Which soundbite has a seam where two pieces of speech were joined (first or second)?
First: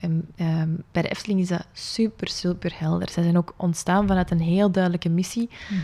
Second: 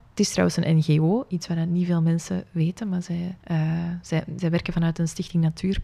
second